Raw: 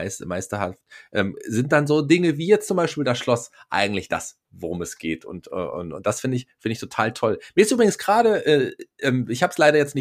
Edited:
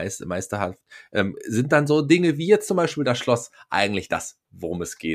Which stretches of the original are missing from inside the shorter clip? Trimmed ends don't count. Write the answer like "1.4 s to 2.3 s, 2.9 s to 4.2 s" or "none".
none